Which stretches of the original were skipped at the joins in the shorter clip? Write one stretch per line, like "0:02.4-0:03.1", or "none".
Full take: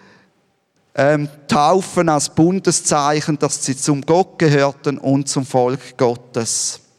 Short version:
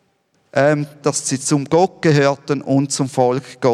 0:01.4-0:03.4